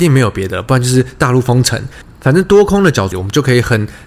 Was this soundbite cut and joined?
yes; 1 cut; at 3.1 s

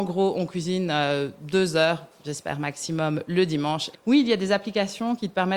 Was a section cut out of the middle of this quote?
yes; 1 cut; at 3.9 s

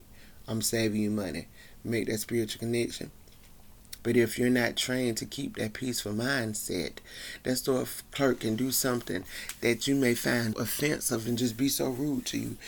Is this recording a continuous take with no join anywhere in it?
no; 2 cuts; at 4.0 s, 10.5 s

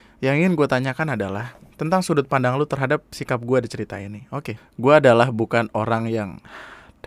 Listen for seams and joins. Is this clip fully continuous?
no; 1 cut; at 4.6 s

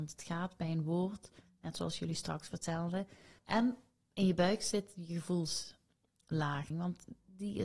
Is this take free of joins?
no; 2 cuts; at 3.4 s, 6.7 s

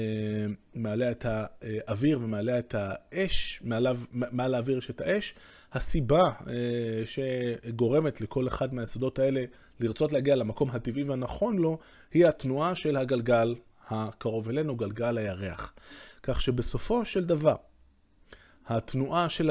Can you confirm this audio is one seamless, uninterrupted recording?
yes; 0 cuts

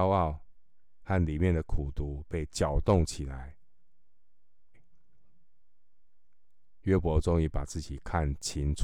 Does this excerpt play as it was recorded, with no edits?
no; 1 cut; at 4.7 s

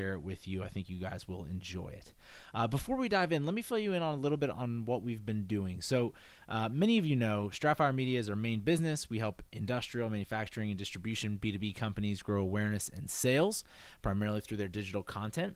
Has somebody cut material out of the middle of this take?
yes; 1 cut; at 9.5 s

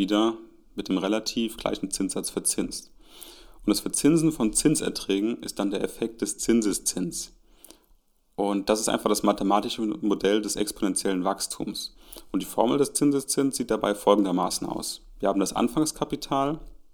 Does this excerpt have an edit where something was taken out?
no; 0 cuts

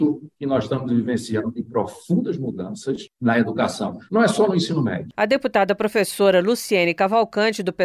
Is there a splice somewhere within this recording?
no; 0 cuts

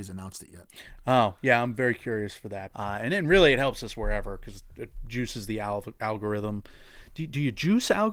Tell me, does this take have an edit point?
yes; 1 cut; at 2.7 s

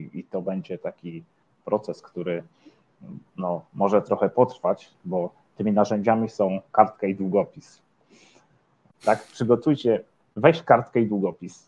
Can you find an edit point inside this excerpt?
yes; 2 cuts; at 3.3 s, 8.9 s

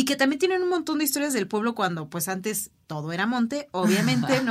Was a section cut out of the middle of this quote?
no; 0 cuts

